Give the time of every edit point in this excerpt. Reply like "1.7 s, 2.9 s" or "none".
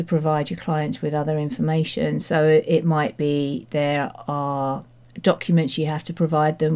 none